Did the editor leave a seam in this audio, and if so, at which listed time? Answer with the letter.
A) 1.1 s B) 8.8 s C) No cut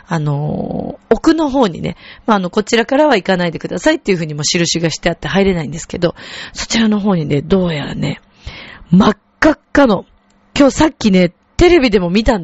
C